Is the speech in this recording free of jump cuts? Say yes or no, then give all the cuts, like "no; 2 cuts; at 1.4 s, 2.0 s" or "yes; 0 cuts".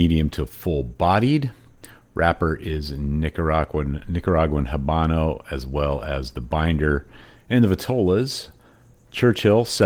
no; 1 cut; at 7.3 s